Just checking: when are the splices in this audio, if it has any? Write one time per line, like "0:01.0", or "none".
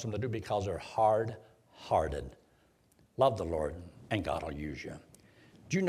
0:04.1